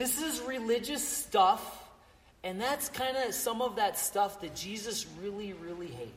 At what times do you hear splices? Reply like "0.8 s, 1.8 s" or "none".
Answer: none